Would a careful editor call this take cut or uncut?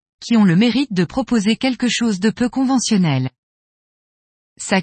uncut